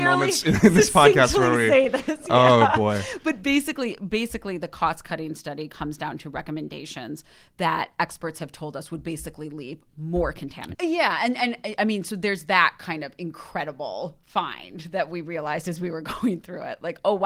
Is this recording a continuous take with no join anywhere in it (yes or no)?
no